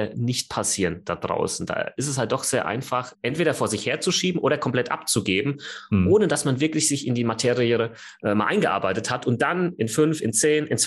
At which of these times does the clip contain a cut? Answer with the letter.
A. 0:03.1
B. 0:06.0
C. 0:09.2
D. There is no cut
A